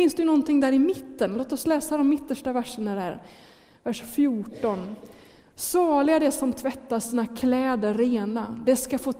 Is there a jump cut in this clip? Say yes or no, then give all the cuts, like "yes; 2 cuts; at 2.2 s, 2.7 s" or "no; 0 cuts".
no; 0 cuts